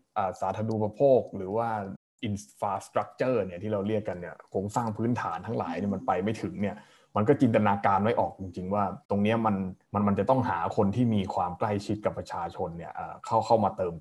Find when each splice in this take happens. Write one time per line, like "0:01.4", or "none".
0:09.8